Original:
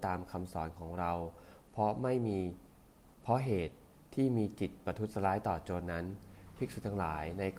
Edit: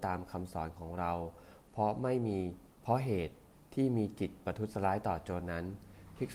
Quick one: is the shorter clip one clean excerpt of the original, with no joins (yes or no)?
no